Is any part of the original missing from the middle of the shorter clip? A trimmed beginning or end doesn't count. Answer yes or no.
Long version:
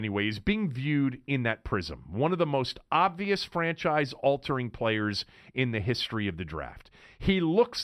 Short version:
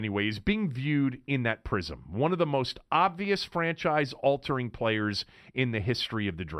no